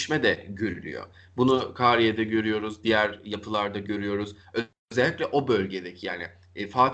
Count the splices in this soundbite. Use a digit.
0